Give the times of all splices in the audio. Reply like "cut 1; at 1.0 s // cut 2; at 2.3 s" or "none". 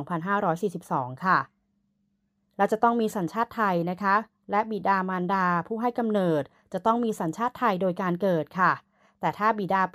none

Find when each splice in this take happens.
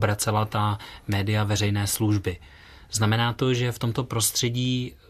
none

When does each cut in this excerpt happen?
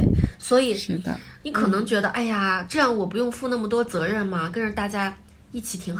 cut 1; at 1.4 s

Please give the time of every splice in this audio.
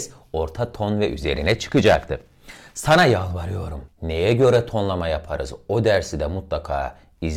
cut 1; at 3.9 s

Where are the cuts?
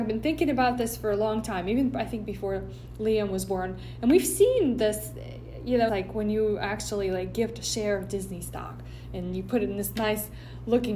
cut 1; at 5.9 s

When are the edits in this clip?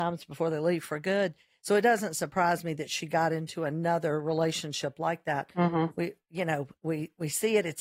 none

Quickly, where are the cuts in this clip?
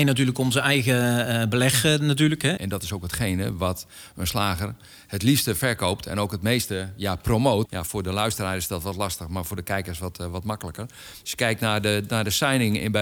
cut 1; at 2.6 s // cut 2; at 7.6 s

